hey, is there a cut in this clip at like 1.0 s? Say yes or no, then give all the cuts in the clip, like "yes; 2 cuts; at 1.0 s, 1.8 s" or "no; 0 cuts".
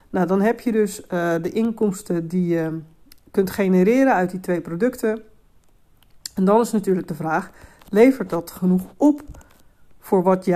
no; 0 cuts